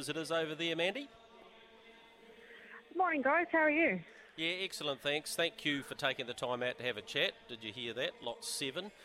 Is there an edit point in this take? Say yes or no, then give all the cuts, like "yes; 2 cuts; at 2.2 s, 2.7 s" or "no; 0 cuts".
no; 0 cuts